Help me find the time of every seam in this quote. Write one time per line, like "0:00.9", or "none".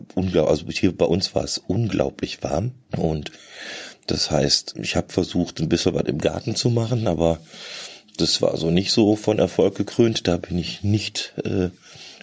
0:02.8
0:04.7